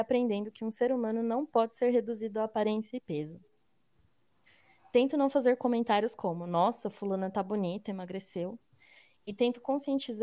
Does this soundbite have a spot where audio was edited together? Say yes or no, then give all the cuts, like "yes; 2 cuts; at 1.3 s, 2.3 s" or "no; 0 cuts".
no; 0 cuts